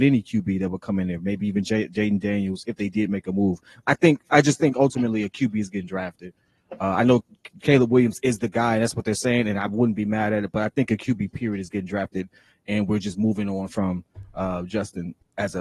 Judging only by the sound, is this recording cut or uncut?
uncut